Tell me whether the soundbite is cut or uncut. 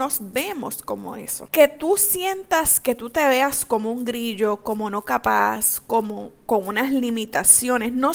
uncut